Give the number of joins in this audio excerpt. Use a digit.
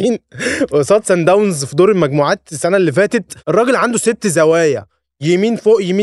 1